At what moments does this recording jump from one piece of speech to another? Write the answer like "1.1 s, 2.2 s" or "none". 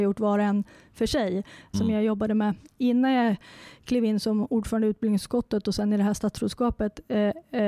1.7 s